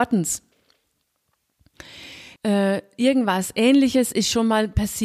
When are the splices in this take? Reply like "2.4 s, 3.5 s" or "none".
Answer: 2.4 s